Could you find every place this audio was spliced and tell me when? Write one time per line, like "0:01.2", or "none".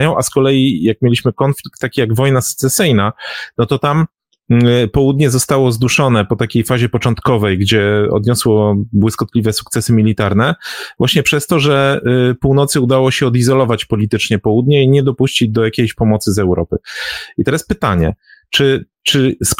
none